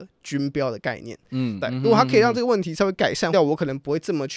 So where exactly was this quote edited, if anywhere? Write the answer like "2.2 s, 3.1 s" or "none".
1.6 s, 3.3 s